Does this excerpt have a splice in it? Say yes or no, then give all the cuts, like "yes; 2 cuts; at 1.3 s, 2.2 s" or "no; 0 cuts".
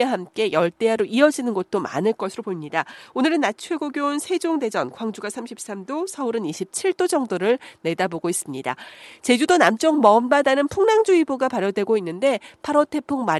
no; 0 cuts